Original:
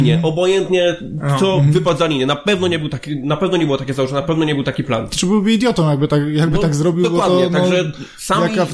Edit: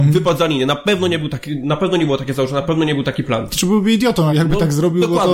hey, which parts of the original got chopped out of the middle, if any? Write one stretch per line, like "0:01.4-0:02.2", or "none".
0:05.9-0:06.3